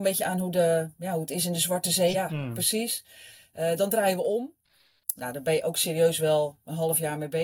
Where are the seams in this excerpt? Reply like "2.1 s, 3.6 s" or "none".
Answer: 2.1 s, 5.2 s